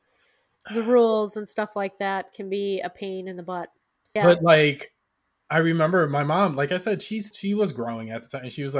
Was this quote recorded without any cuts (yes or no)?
no